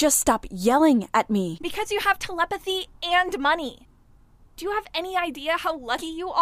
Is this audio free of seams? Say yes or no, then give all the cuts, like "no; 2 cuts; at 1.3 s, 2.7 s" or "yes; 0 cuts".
no; 1 cut; at 1.6 s